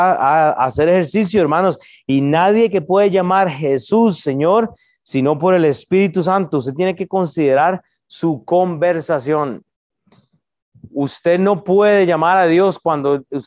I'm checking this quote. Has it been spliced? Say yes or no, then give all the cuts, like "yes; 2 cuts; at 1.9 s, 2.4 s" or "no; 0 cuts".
no; 0 cuts